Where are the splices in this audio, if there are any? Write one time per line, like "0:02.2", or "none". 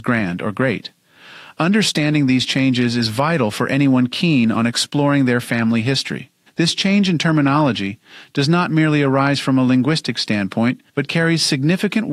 0:06.5
0:10.9